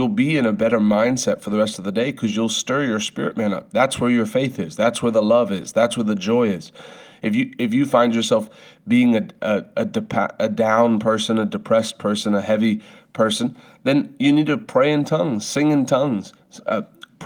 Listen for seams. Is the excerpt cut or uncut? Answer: uncut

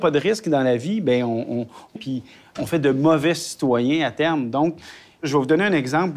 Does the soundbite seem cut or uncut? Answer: cut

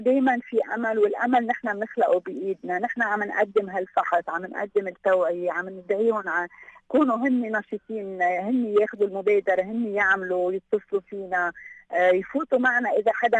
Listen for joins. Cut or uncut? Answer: uncut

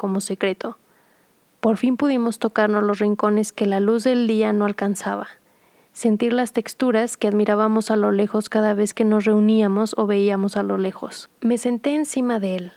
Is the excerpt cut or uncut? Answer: uncut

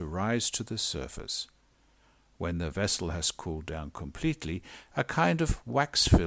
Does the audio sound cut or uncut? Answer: uncut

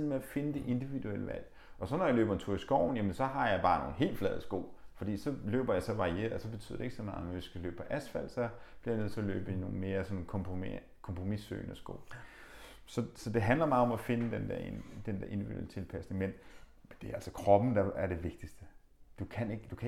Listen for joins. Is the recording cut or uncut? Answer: uncut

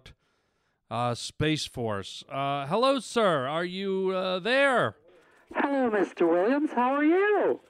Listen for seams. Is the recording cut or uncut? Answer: uncut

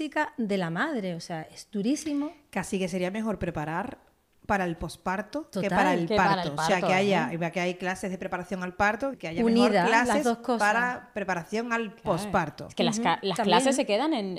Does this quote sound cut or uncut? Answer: cut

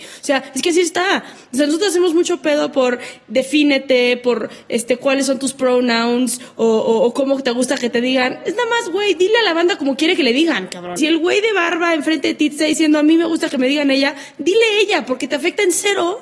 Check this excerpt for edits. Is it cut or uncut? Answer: cut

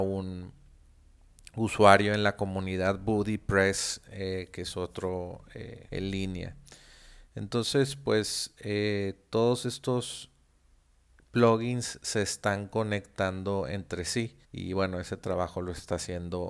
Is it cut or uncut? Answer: cut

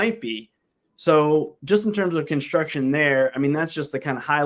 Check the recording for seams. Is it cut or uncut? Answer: uncut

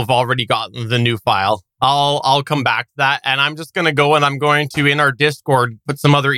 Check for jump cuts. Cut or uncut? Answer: uncut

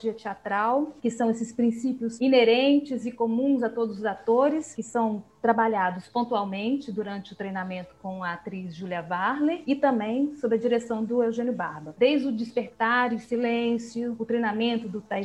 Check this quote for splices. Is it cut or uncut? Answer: cut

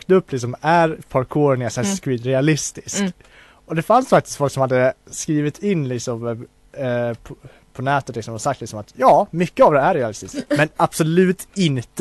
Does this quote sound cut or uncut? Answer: uncut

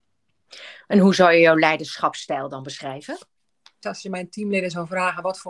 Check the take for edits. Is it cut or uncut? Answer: cut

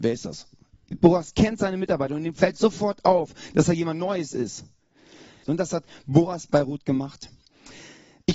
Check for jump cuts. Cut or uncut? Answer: cut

